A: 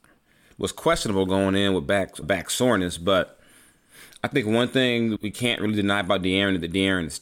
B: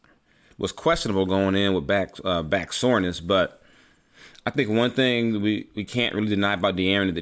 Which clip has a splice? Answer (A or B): A